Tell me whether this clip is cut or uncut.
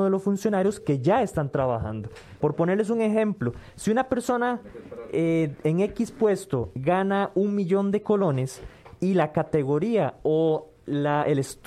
cut